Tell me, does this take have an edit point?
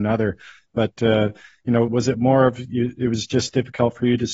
yes; 1 cut; at 1.9 s

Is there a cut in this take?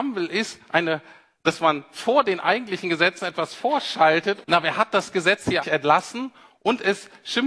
yes; 2 cuts; at 4.4 s, 5.6 s

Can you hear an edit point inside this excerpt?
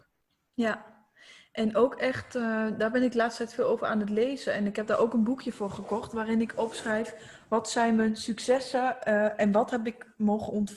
no; 0 cuts

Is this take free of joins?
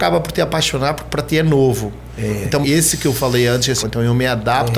no; 2 cuts; at 2.6 s, 3.8 s

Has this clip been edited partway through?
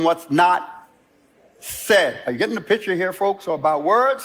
no; 0 cuts

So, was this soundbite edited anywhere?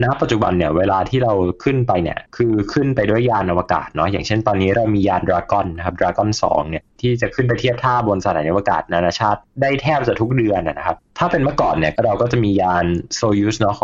yes; 1 cut; at 2.3 s

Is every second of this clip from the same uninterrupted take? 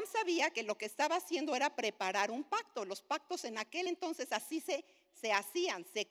yes; 0 cuts

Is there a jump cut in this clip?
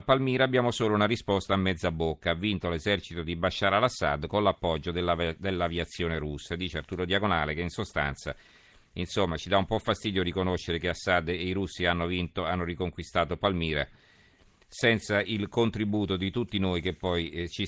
no; 0 cuts

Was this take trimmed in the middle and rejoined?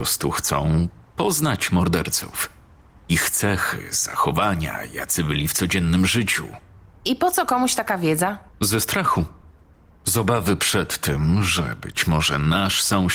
yes; 1 cut; at 8.5 s

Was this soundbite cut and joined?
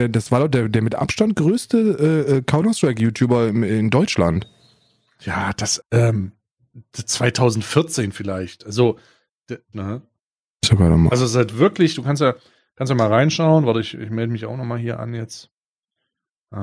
yes; 2 cuts; at 5.8 s, 9.7 s

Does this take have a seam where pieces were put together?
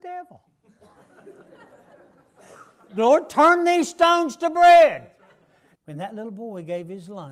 yes; 2 cuts; at 2.9 s, 5.7 s

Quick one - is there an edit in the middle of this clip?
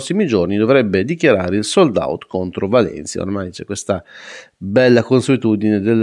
no; 0 cuts

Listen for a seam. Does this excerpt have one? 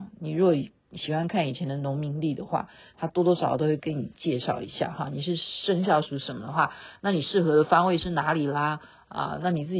no; 0 cuts

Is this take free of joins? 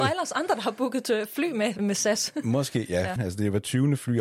no; 2 cuts; at 1.8 s, 3.2 s

